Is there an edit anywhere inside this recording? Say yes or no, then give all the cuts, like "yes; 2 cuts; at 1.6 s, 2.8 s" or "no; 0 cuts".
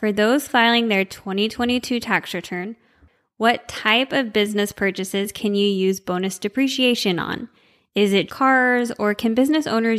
yes; 1 cut; at 8.3 s